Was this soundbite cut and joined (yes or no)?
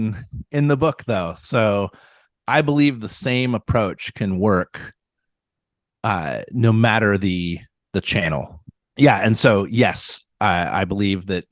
no